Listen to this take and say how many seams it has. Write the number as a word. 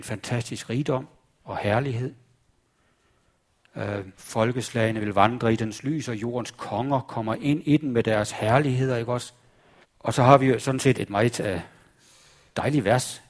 three